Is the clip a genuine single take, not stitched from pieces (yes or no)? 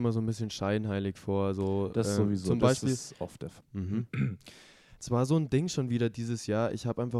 no